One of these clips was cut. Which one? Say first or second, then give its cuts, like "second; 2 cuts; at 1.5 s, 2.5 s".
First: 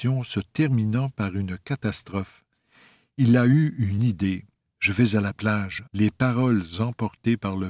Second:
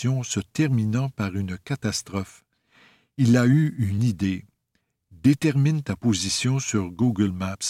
first; 2 cuts; at 4.6 s, 5.9 s